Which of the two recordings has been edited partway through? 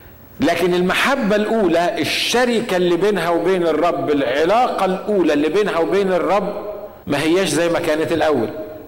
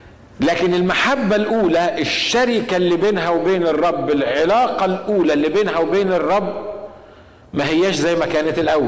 first; 1 cut; at 7.0 s

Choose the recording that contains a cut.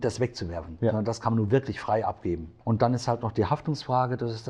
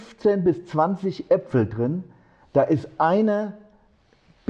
first; 1 cut; at 2.6 s

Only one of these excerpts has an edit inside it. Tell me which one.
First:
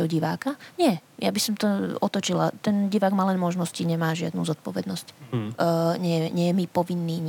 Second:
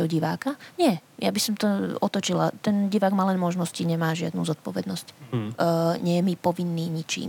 second; 1 cut; at 6.0 s

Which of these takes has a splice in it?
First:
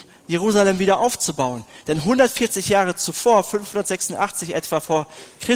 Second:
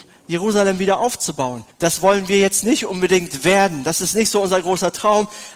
second; 1 cut; at 1.7 s

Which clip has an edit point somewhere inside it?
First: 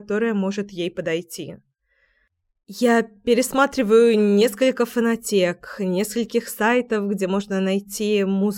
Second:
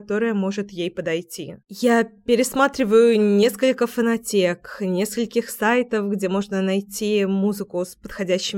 second; 1 cut; at 1.6 s

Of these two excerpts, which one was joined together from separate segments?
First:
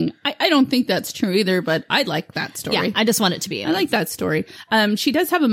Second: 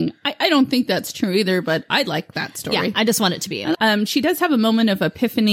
second; 1 cut; at 3.7 s

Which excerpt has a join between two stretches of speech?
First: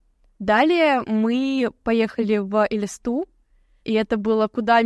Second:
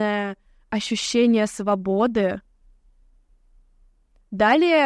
first; 1 cut; at 3.8 s

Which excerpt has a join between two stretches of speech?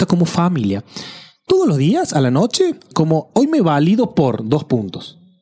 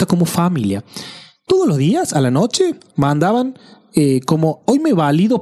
first; 1 cut; at 2.9 s

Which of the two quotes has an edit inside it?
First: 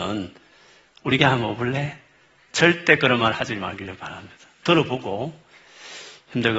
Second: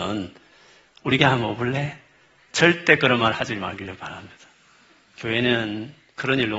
first; 1 cut; at 4.6 s

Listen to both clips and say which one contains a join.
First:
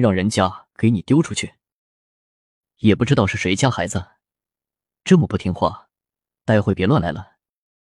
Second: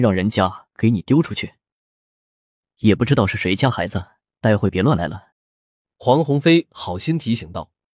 second; 2 cuts; at 4.3 s, 5.3 s

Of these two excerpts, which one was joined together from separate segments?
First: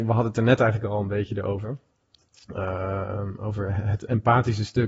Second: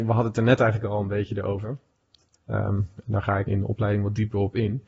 second; 2 cuts; at 2.3 s, 3.5 s

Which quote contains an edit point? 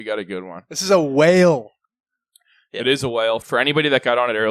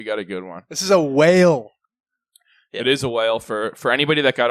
first; 1 cut; at 3.4 s

